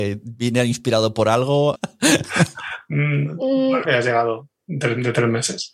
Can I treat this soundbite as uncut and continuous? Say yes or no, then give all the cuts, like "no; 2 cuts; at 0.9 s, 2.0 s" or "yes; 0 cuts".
no; 2 cuts; at 1.8 s, 3.8 s